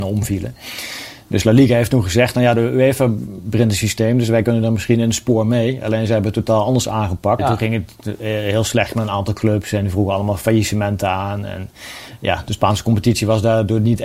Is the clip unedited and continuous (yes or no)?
no